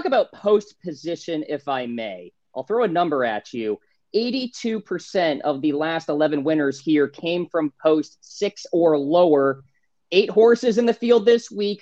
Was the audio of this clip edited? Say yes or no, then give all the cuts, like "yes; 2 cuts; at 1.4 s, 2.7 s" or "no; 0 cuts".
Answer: no; 0 cuts